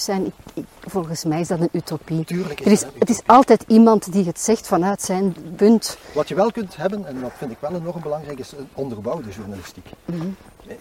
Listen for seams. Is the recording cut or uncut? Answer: cut